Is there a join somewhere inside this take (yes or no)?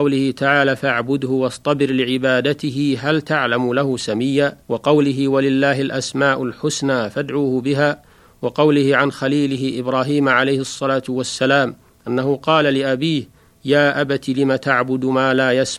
yes